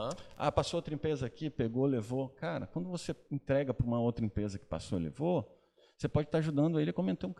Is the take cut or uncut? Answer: uncut